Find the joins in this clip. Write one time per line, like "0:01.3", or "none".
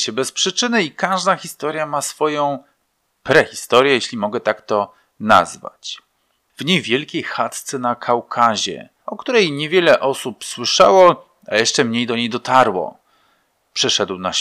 0:06.5
0:09.0